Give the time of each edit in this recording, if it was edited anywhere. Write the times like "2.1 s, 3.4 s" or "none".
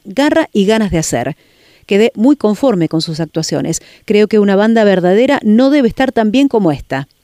none